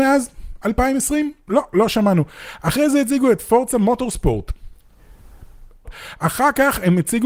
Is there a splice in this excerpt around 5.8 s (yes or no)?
yes